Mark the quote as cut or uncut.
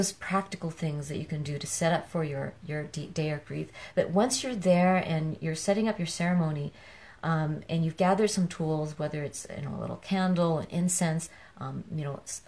uncut